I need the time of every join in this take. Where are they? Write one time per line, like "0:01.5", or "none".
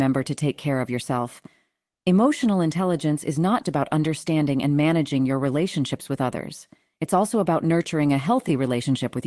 0:03.6